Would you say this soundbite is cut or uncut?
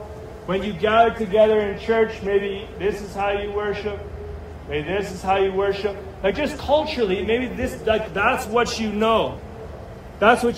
uncut